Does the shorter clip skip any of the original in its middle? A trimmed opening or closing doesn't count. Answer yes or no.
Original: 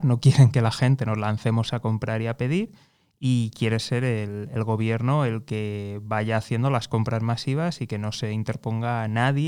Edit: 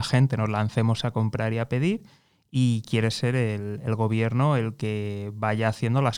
no